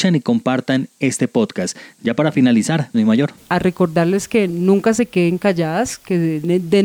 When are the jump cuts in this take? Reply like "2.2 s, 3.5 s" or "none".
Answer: 2.9 s